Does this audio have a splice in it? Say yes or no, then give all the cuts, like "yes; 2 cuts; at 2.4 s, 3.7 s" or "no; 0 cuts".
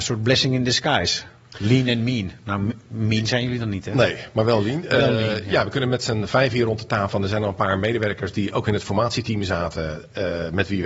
no; 0 cuts